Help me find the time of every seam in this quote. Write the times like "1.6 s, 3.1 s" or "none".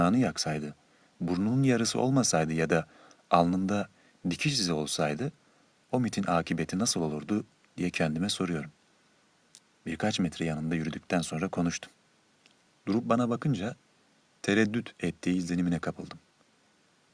9.8 s